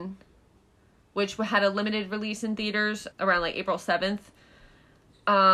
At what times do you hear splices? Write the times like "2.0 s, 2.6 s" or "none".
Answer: 3.1 s

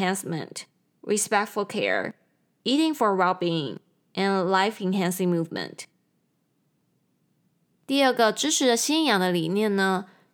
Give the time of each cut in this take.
none

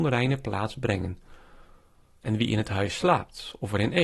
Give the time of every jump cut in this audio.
2.2 s

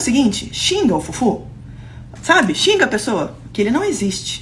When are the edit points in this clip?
2.2 s, 3.5 s

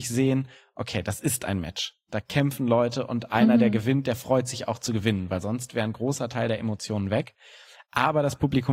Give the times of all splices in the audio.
none

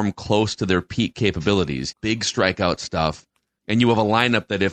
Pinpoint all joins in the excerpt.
1.9 s, 3.6 s

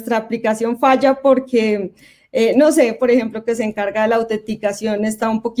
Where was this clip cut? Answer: 3.0 s

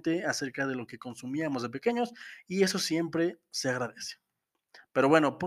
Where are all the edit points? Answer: none

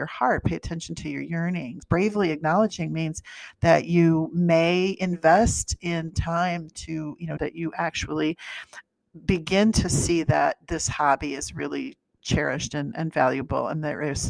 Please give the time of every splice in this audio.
1.8 s, 7.4 s

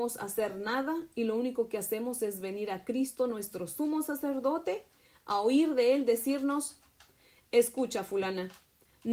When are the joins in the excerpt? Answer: none

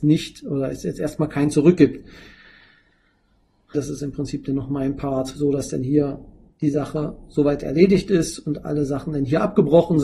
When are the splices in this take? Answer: 3.7 s

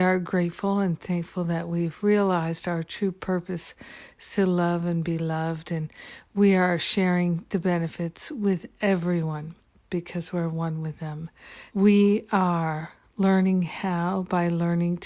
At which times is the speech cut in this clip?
11.7 s

